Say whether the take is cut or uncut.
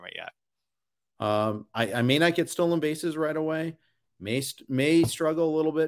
cut